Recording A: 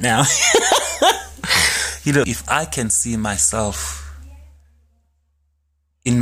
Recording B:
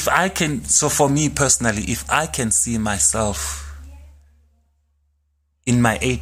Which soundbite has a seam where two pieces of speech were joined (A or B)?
A